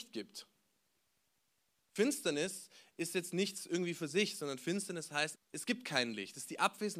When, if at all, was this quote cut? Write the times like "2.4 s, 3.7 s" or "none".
5.4 s